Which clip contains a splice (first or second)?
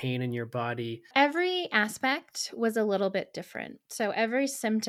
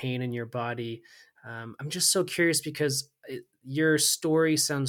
first